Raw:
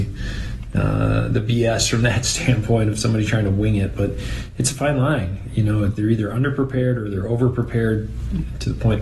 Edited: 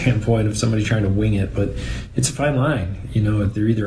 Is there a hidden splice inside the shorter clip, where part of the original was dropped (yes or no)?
no